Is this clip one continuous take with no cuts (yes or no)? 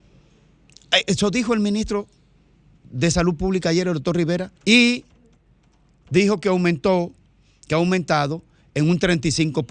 no